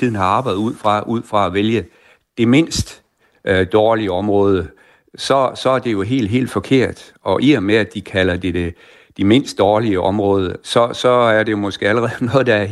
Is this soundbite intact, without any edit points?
yes; 0 cuts

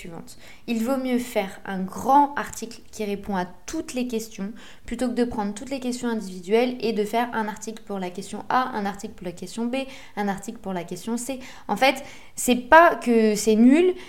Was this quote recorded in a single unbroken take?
yes; 0 cuts

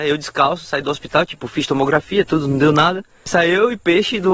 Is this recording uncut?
yes; 0 cuts

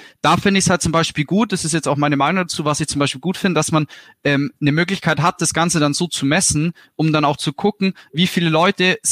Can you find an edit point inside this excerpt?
no; 0 cuts

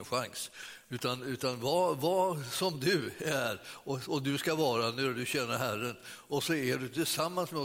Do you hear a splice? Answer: no; 0 cuts

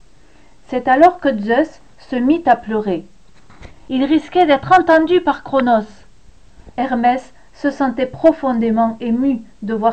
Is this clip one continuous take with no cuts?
no; 2 cuts; at 3.9 s, 6.7 s

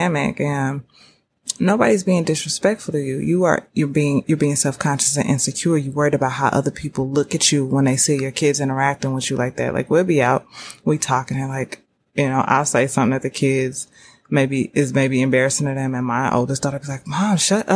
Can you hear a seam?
yes; 1 cut; at 4.2 s

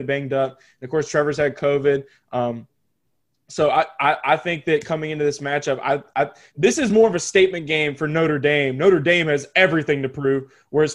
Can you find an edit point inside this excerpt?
no; 0 cuts

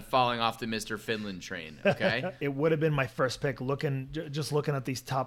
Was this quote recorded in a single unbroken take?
no; 1 cut; at 2.4 s

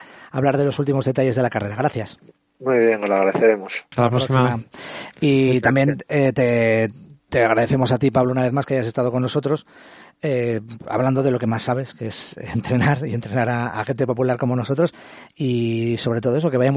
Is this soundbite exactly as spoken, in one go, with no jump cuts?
no; 1 cut; at 3.9 s

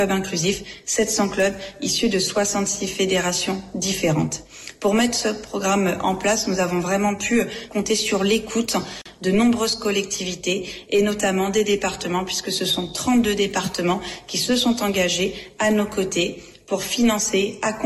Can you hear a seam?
no; 0 cuts

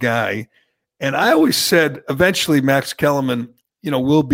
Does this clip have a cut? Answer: no; 0 cuts

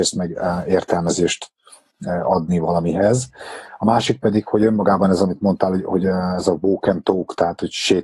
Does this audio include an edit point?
no; 0 cuts

